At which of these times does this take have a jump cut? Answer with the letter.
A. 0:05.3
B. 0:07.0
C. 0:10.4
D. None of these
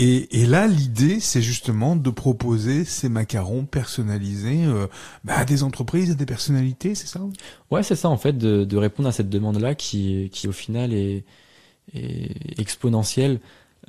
D